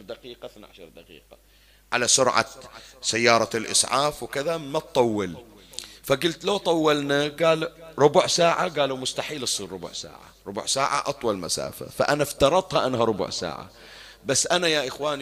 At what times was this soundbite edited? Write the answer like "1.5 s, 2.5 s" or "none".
none